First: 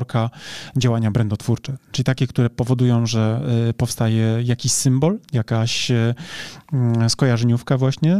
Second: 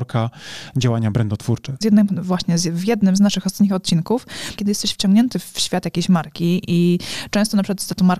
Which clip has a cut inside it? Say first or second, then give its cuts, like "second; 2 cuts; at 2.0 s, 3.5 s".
second; 2 cuts; at 1.8 s, 4.6 s